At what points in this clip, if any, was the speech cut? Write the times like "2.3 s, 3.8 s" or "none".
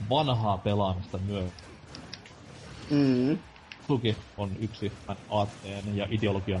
3.9 s